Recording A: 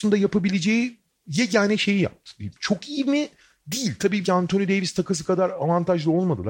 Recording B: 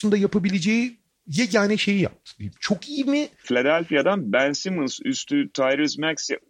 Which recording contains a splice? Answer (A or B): B